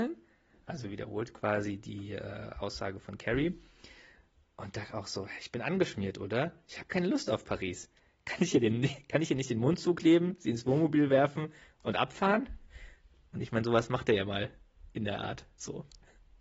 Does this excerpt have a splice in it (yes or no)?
no